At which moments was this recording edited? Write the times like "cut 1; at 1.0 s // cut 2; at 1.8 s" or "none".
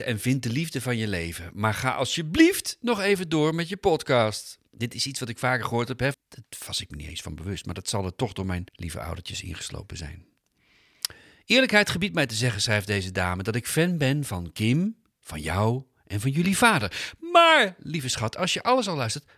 cut 1; at 4.7 s // cut 2; at 6.1 s // cut 3; at 8.7 s